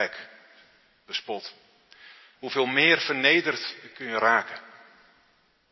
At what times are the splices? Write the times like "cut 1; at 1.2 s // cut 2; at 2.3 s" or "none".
cut 1; at 2.4 s